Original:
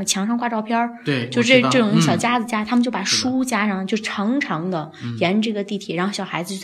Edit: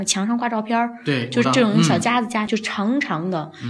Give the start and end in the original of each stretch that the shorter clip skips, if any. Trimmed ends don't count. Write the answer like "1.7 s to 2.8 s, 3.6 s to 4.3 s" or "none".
1.4 s to 1.6 s, 2.7 s to 3.9 s